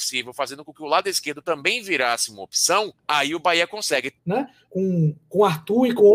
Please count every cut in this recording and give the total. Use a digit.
2